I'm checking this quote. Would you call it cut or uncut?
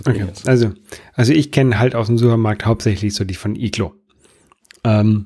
uncut